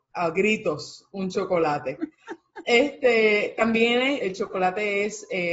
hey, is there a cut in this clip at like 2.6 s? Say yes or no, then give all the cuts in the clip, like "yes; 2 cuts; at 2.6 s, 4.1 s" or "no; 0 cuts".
no; 1 cut; at 4.2 s